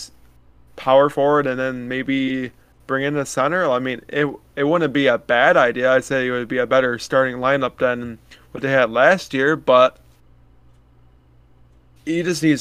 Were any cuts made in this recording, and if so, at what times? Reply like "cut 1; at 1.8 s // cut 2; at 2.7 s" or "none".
none